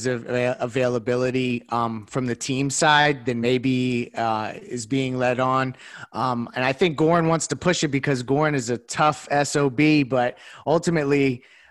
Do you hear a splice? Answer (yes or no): no